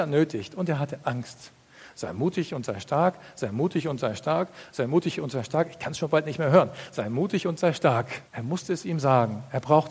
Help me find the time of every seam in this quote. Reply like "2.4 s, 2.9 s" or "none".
8.3 s